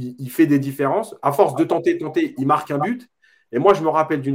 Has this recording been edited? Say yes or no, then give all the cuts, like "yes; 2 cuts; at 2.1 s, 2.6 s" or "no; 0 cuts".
no; 0 cuts